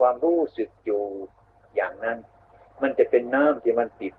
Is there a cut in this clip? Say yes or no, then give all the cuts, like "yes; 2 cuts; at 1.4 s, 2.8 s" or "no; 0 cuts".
no; 0 cuts